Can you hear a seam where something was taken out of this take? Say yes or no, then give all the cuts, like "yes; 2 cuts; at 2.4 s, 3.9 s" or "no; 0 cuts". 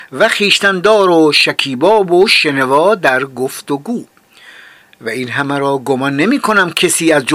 no; 0 cuts